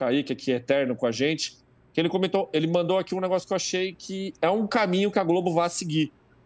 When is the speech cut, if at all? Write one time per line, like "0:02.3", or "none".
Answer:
none